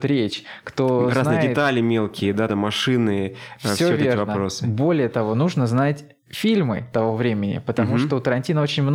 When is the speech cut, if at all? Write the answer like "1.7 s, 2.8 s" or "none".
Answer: 2.5 s

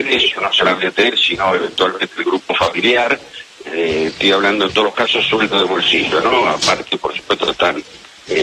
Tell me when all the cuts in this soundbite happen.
3.6 s

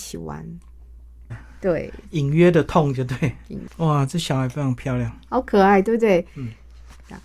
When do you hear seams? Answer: 1.3 s

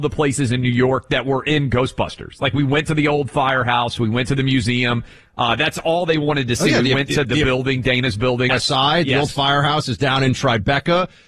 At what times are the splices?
7.2 s, 8.5 s

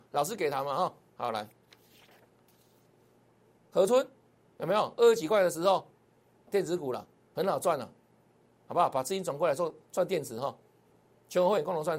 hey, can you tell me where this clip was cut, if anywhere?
6.5 s

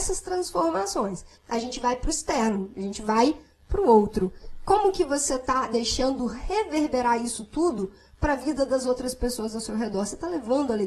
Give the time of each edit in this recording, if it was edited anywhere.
1.4 s

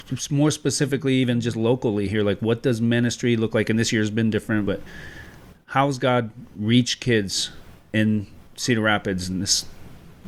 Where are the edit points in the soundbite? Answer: 4.6 s

